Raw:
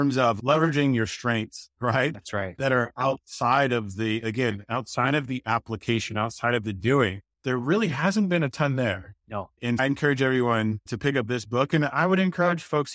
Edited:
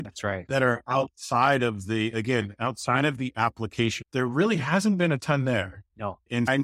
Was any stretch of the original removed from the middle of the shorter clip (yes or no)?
yes